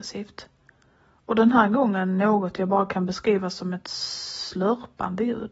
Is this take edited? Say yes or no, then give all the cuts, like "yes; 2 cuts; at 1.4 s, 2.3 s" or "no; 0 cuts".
no; 0 cuts